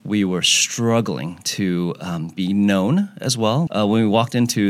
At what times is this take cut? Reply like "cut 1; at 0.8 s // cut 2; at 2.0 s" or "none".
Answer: cut 1; at 3.7 s